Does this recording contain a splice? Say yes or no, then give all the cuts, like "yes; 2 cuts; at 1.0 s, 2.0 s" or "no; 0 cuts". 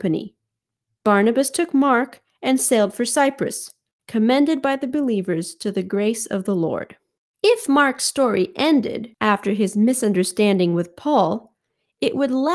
yes; 2 cuts; at 3.9 s, 7.3 s